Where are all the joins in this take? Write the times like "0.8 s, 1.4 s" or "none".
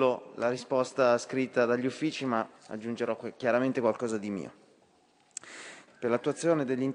2.6 s, 5.9 s